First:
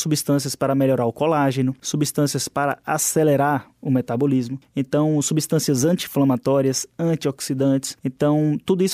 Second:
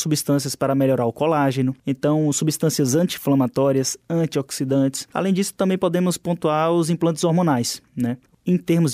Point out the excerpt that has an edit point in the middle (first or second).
second